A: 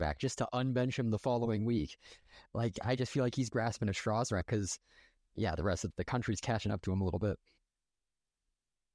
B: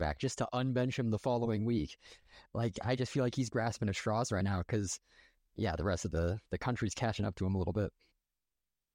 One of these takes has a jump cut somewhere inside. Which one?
A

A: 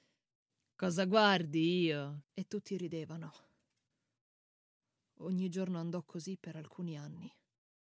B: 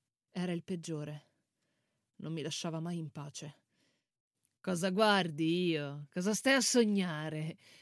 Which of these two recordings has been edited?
A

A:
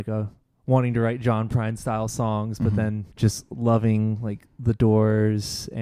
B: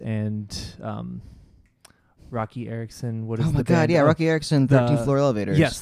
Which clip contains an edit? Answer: A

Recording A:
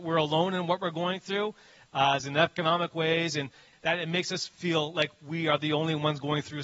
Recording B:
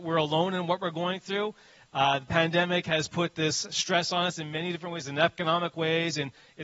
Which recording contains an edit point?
A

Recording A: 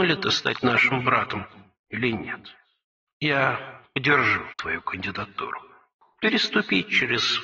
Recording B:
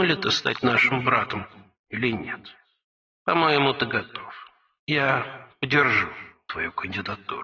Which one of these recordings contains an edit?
A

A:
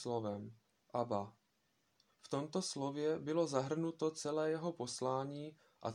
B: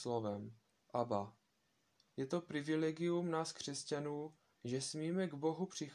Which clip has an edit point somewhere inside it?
B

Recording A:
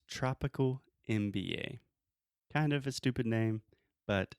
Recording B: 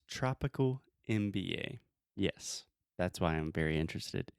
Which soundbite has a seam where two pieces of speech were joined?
B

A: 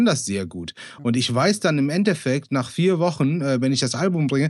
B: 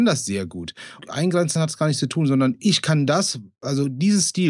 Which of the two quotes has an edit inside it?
B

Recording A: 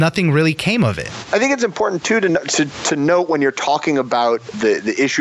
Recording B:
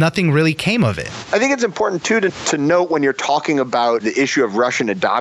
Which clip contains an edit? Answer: B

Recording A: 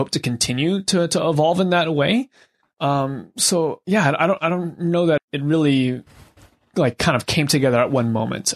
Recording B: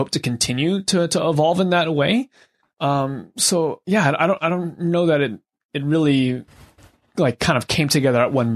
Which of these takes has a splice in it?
A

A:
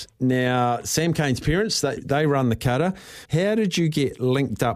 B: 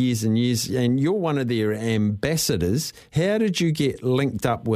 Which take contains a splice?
A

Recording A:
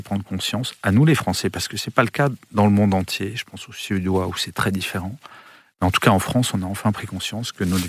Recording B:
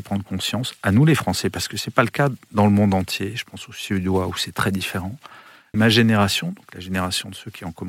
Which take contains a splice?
B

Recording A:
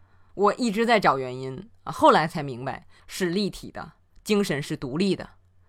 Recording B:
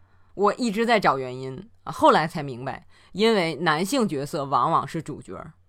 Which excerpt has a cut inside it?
A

